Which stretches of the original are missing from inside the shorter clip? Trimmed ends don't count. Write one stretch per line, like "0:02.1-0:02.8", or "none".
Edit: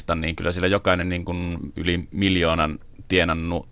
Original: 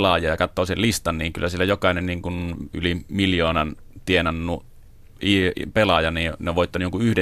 none